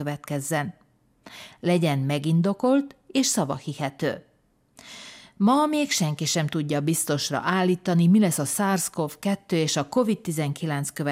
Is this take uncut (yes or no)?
yes